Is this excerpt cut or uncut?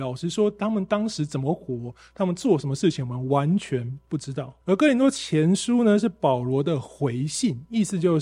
cut